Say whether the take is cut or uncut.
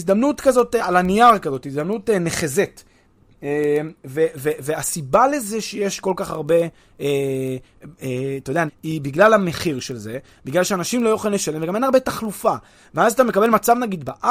cut